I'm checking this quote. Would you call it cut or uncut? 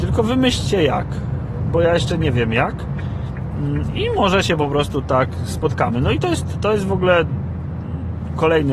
uncut